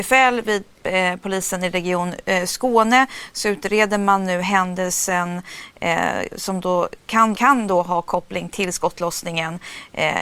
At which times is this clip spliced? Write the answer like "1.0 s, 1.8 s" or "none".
7.3 s